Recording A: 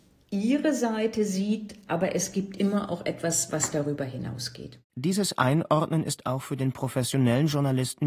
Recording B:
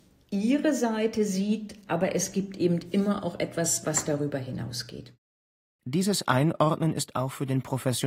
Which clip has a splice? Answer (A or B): A